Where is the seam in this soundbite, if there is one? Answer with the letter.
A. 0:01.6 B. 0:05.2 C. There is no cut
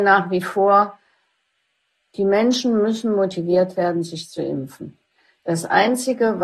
C